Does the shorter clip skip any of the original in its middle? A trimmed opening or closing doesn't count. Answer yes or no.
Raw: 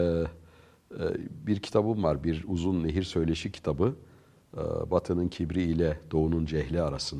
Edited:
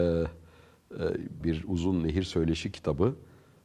yes